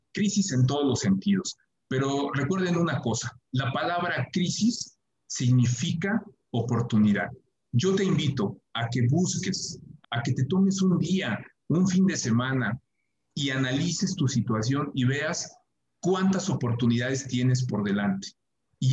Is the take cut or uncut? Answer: cut